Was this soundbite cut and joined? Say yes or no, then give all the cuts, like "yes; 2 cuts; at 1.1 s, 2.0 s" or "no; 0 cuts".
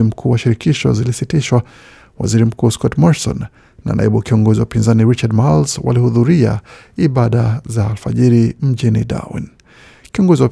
no; 0 cuts